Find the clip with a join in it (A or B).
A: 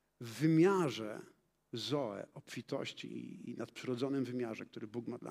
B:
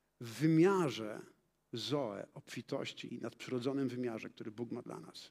B